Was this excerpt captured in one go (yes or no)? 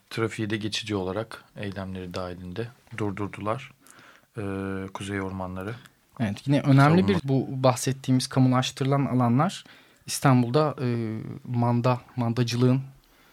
no